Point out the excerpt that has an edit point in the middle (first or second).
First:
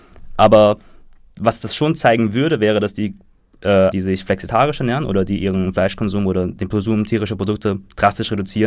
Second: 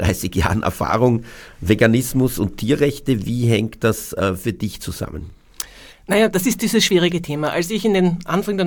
first